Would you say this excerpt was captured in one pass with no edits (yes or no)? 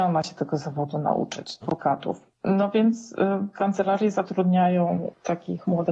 no